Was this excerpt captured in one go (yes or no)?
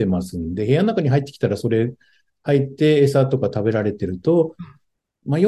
yes